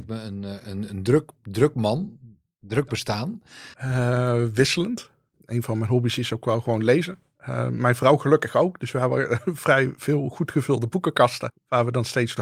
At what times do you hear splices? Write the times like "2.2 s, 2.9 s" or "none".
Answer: 3.7 s